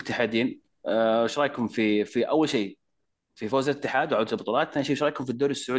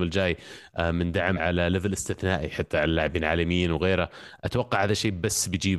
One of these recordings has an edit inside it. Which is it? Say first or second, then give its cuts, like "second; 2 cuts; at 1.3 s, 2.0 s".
second; 1 cut; at 1.4 s